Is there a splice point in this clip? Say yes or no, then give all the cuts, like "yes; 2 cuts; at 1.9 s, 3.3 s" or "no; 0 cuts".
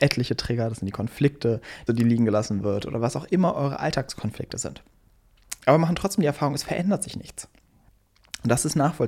yes; 2 cuts; at 1.9 s, 5.6 s